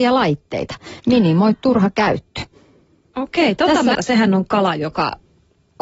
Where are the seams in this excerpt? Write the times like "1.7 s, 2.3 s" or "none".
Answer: 1.0 s, 3.9 s